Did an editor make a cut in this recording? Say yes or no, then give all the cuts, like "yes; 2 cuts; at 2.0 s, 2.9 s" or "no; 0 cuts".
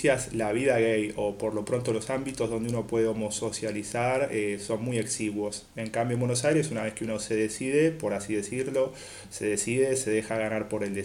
no; 0 cuts